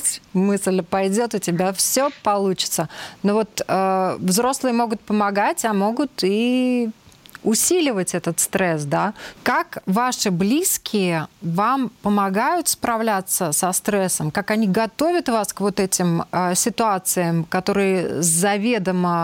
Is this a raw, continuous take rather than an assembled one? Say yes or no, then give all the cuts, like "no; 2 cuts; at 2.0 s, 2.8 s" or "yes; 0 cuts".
no; 1 cut; at 9.4 s